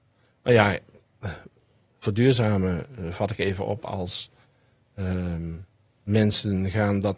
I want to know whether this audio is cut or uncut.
uncut